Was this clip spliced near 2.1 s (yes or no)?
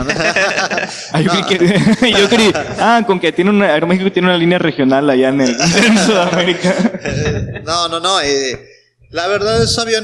yes